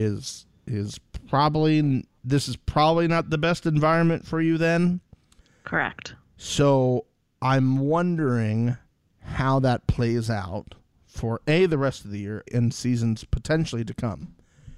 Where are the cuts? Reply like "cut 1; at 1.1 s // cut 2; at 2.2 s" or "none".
cut 1; at 12.5 s